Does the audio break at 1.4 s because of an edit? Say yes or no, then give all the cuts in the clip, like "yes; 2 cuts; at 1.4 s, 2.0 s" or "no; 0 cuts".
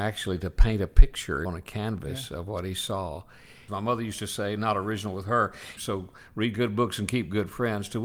yes; 3 cuts; at 1.4 s, 3.7 s, 5.8 s